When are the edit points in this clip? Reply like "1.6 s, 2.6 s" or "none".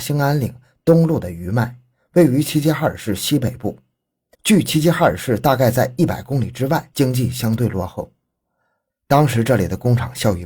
8.9 s